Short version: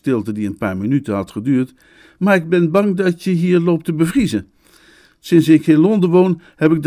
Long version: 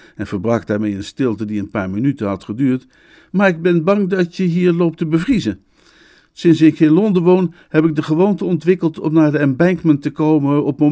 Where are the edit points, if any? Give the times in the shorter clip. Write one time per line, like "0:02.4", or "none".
none